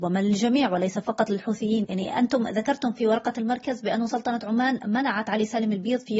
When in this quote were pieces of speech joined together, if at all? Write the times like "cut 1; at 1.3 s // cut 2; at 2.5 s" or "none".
cut 1; at 1.8 s